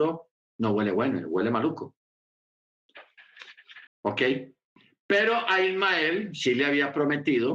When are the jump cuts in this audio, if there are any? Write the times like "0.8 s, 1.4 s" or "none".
3.9 s

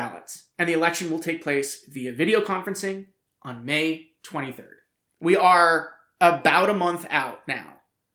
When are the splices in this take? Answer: none

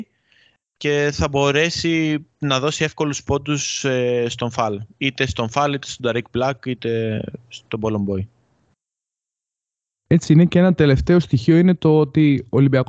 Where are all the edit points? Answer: none

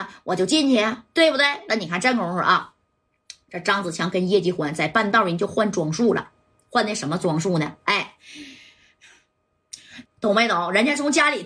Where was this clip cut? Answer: 10.0 s

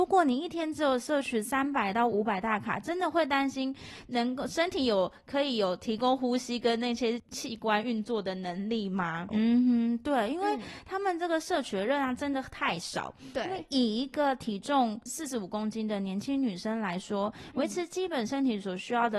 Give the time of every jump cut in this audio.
9.3 s, 15.1 s

